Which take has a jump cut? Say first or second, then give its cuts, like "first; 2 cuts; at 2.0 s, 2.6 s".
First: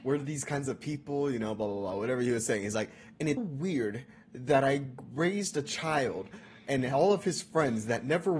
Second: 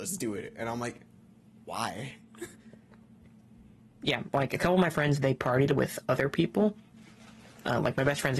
first; 1 cut; at 3.4 s